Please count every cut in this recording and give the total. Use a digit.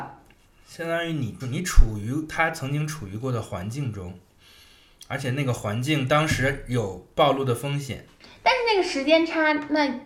1